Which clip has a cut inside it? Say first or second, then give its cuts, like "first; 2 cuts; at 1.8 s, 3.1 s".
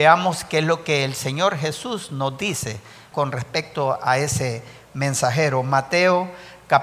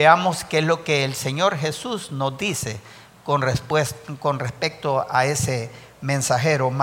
first; 1 cut; at 3.1 s